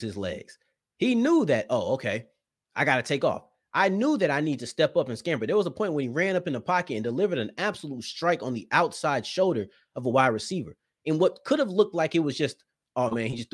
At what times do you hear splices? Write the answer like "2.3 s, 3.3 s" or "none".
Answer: none